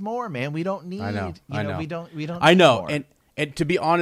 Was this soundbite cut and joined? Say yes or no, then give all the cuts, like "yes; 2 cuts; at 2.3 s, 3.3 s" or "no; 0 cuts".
no; 0 cuts